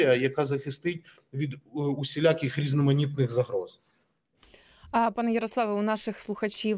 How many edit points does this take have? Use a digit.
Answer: 0